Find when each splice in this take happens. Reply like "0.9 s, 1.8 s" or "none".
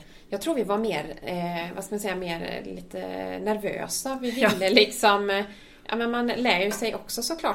none